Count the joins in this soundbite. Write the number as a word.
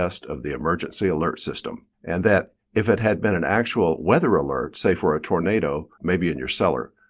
two